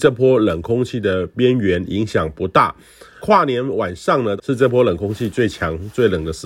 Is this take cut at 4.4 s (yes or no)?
yes